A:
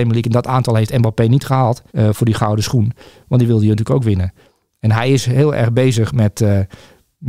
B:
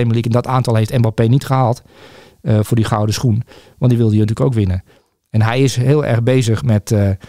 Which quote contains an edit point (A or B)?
A